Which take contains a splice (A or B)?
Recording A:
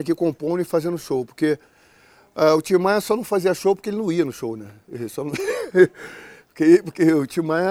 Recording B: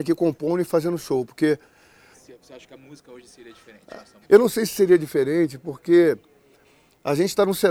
B